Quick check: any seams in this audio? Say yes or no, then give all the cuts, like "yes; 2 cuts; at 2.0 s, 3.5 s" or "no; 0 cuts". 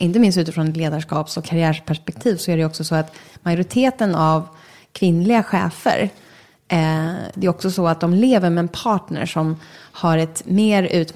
yes; 1 cut; at 7.3 s